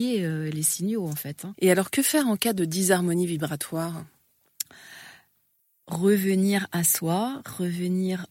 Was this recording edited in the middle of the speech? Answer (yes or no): yes